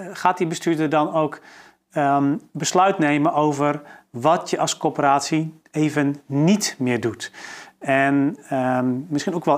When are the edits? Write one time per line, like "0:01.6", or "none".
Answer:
none